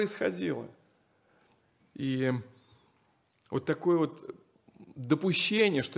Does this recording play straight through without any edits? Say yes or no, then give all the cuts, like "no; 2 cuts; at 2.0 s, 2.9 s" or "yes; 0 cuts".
yes; 0 cuts